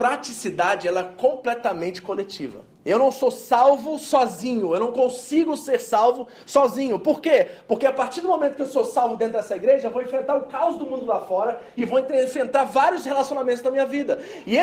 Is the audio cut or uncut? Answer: cut